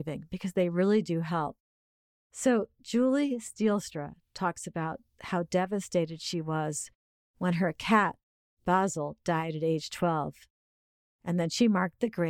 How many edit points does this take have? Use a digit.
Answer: 1